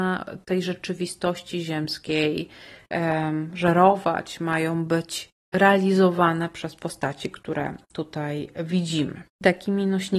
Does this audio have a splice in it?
no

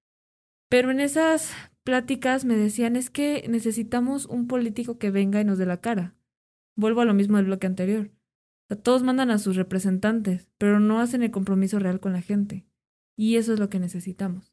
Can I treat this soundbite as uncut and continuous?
yes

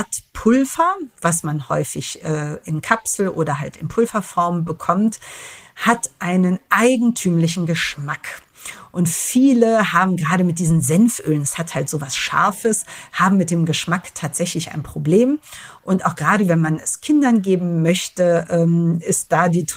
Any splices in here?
no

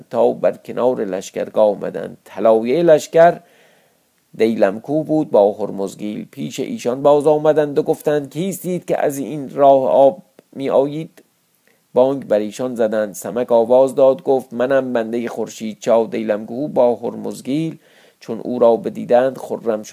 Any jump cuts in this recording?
no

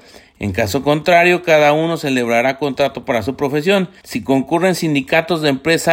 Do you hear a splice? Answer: yes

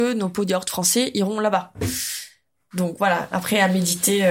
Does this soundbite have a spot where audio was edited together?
no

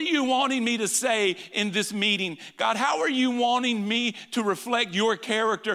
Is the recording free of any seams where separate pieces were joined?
yes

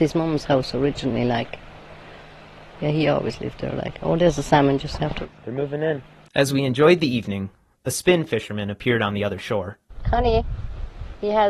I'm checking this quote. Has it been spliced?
no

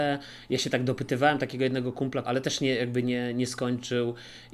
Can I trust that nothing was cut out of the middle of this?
no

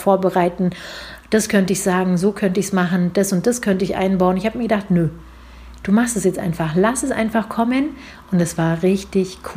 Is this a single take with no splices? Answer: yes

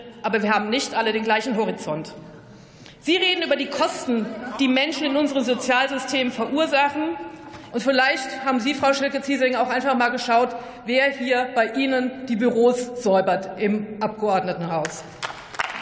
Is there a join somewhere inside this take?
yes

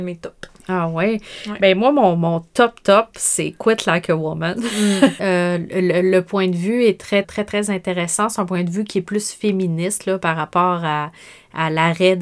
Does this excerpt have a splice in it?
yes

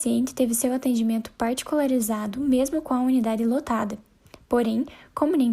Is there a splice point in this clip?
no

